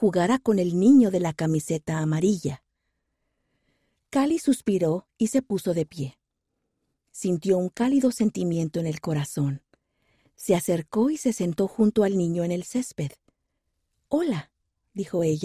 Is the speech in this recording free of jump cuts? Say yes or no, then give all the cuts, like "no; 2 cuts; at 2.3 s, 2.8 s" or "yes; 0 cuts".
yes; 0 cuts